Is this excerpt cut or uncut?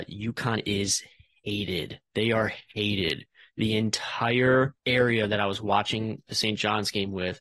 cut